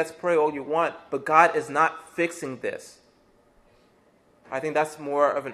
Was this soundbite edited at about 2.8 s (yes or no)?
no